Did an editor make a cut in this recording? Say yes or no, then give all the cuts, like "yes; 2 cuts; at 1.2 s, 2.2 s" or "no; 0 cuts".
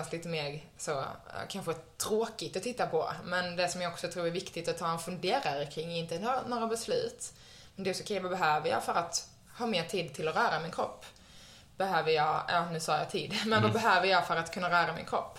no; 0 cuts